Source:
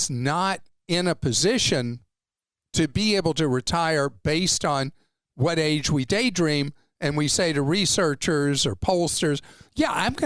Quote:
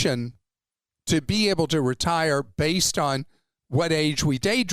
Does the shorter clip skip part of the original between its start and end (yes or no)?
no